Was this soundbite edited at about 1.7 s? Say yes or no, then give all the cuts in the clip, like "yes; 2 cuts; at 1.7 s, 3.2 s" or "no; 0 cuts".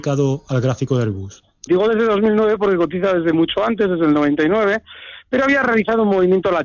yes; 1 cut; at 1.7 s